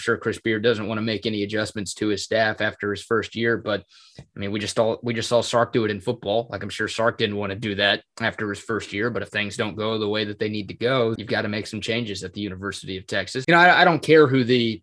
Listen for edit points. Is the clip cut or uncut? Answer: cut